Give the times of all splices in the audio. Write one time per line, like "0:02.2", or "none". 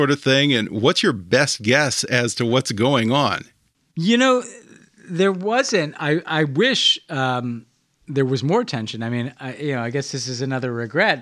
none